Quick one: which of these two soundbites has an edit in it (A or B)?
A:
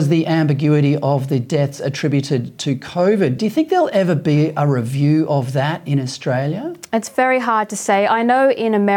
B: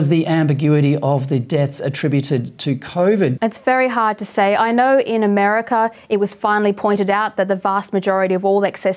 B